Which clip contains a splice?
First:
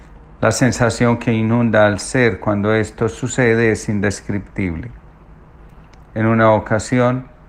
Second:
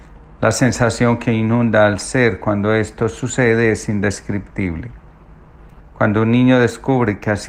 second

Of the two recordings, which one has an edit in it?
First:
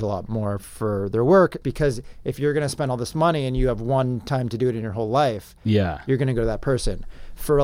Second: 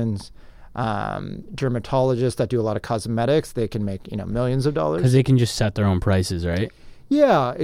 first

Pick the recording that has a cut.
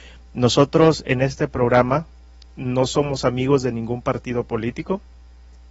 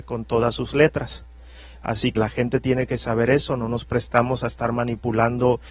second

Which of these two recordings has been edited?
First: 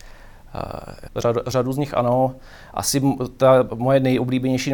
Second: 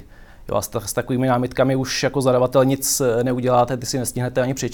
first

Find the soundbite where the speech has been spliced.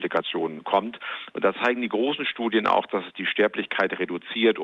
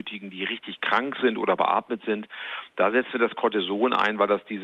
first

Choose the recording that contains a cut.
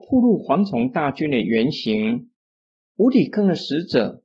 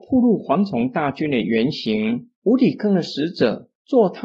second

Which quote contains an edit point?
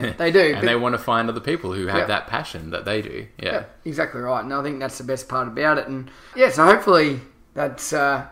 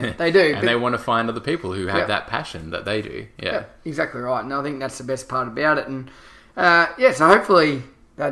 first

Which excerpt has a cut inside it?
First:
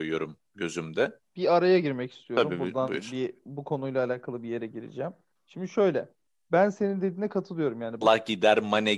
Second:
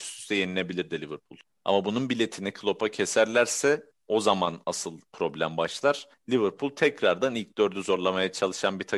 first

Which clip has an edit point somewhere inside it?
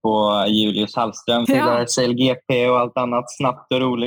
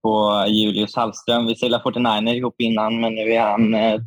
first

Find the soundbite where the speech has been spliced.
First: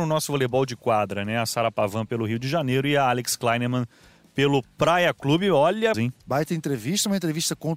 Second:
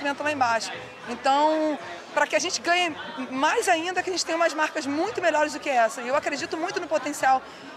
first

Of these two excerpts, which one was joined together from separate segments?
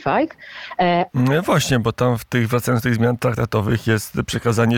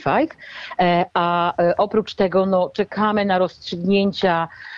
first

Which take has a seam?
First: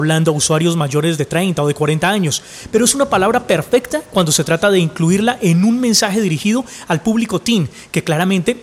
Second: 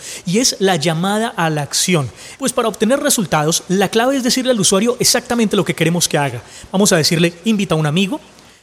second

